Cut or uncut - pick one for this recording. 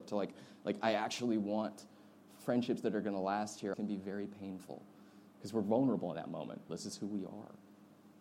cut